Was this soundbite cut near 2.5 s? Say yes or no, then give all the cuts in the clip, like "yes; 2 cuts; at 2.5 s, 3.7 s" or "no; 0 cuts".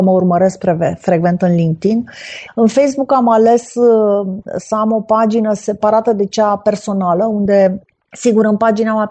yes; 1 cut; at 2.5 s